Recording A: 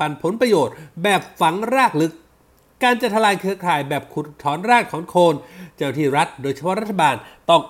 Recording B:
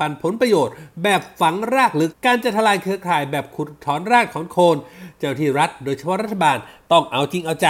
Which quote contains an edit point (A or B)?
B